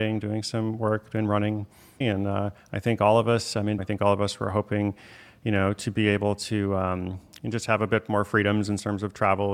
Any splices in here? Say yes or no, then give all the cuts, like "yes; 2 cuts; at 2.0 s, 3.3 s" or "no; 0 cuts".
yes; 2 cuts; at 2.0 s, 3.8 s